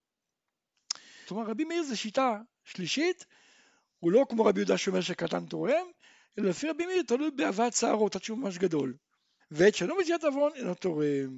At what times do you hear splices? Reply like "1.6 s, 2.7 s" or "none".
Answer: 1.3 s, 6.2 s, 9.4 s